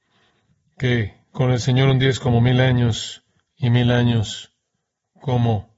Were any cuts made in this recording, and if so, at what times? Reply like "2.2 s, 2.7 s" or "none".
none